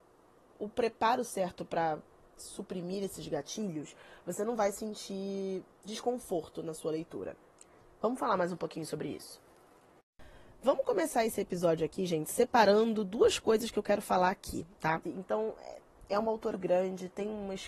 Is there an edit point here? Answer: yes; 2 cuts; at 15.0 s, 16.5 s

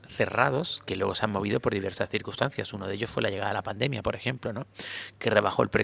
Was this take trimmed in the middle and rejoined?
no; 0 cuts

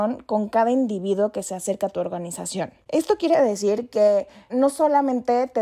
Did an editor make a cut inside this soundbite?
yes; 1 cut; at 4.5 s

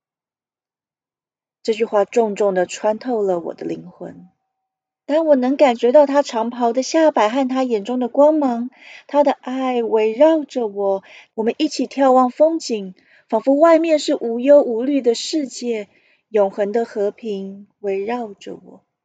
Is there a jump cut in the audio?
yes; 2 cuts; at 5.1 s, 11.3 s

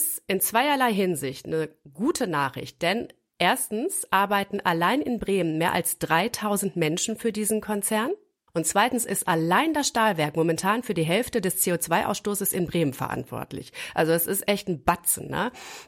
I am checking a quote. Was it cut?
yes; 1 cut; at 8.5 s

